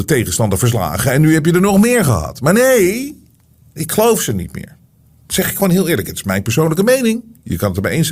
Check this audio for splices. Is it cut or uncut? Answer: cut